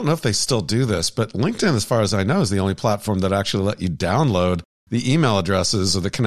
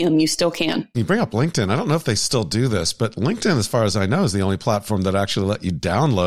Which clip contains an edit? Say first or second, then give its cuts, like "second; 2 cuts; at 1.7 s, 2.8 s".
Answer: second; 1 cut; at 0.9 s